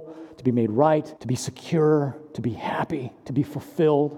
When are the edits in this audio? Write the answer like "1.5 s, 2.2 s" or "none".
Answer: 1.2 s